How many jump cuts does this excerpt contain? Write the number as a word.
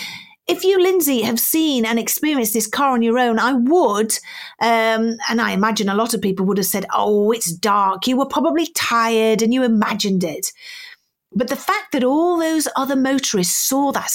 zero